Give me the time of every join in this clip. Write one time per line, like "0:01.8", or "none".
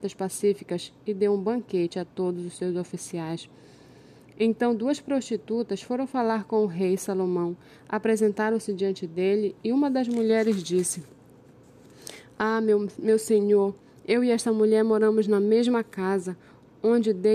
none